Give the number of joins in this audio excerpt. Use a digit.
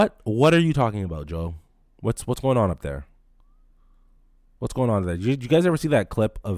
0